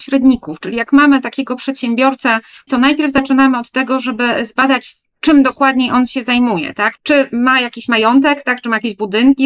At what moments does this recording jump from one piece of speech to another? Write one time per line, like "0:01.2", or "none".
0:02.7
0:07.0